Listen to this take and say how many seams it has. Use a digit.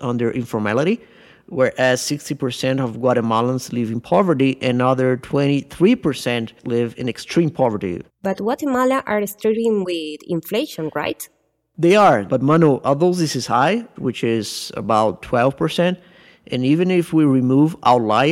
3